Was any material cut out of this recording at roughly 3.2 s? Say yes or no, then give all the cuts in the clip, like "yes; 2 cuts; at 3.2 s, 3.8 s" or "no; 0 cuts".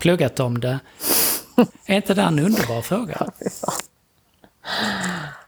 no; 1 cut; at 1.7 s